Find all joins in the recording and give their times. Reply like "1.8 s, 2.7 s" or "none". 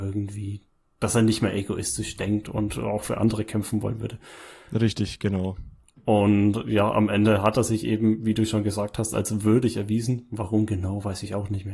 5.9 s